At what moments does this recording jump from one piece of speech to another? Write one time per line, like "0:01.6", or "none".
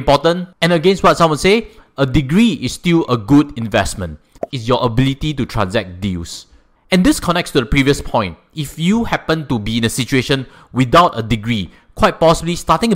0:04.5